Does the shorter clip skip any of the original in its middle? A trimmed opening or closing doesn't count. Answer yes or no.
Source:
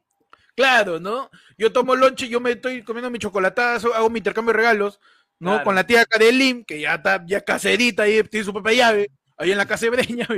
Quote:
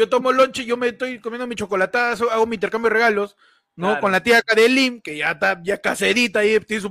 no